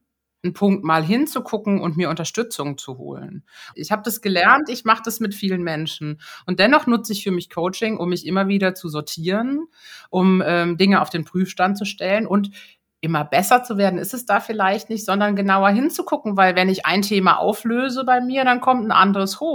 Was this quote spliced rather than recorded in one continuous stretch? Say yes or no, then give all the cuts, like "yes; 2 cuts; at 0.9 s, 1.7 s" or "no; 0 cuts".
yes; 1 cut; at 3.7 s